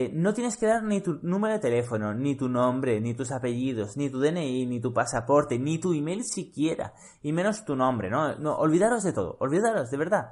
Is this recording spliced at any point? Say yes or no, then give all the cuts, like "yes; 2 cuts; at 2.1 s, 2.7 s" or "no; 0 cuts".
no; 0 cuts